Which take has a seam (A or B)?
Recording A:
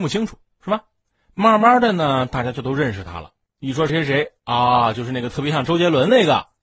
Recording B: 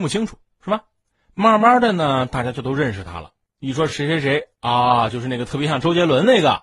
A